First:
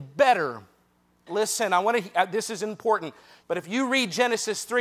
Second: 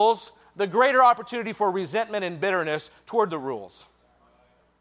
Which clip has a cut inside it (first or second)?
first